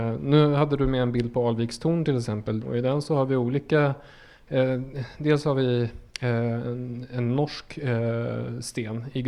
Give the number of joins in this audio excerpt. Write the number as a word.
one